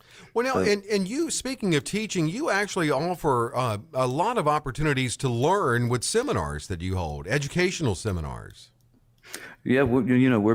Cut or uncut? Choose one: uncut